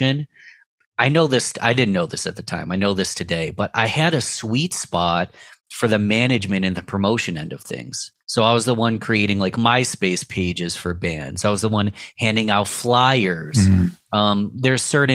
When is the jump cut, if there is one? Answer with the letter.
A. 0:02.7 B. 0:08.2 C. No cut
B